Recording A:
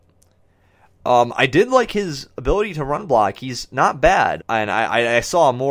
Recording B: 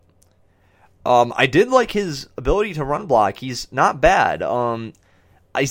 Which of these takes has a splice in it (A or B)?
A